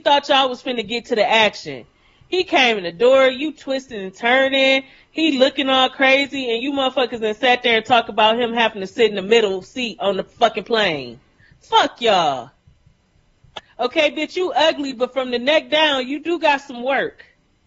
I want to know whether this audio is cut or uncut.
uncut